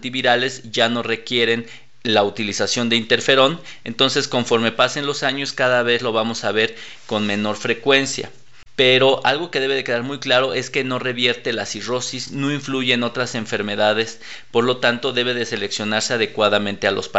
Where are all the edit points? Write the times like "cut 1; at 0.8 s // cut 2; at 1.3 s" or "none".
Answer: none